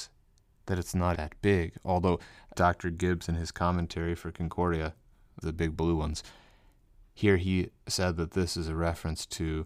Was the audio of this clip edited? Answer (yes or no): yes